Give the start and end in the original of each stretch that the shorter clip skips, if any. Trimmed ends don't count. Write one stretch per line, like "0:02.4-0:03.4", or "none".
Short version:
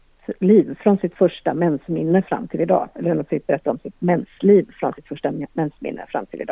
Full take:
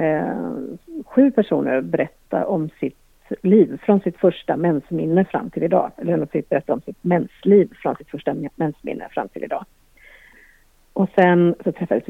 none